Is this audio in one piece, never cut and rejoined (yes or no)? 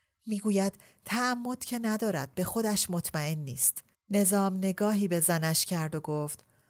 no